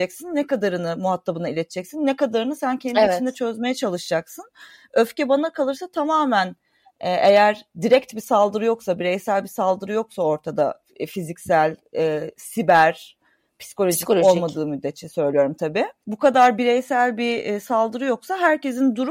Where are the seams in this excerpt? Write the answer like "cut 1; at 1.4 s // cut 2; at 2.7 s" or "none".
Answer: none